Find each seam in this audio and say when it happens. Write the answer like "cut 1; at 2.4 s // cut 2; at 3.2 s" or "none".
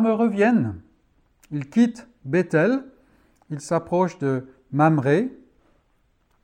none